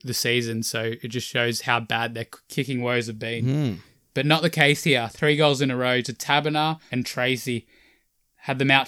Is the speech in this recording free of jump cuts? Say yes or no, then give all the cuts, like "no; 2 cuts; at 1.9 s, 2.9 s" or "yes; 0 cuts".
no; 1 cut; at 6.9 s